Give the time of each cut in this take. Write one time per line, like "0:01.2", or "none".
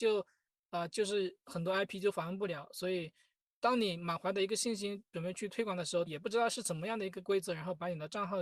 0:06.1